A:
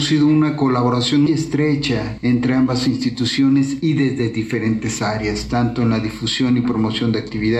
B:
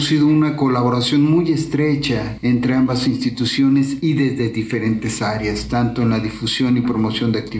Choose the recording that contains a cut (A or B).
A